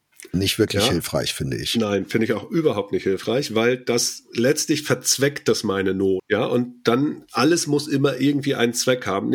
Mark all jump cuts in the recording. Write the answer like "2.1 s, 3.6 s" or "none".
6.2 s